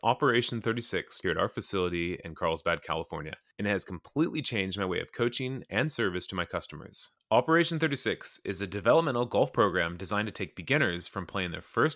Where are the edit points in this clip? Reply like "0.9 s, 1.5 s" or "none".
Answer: none